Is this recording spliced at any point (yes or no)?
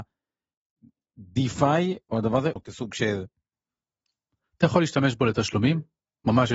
yes